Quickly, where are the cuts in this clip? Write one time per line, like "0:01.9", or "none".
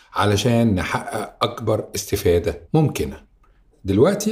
none